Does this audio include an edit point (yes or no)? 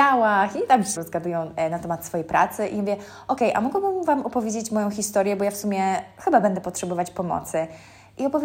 yes